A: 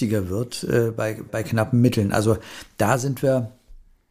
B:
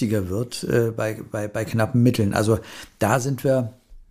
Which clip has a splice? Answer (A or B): A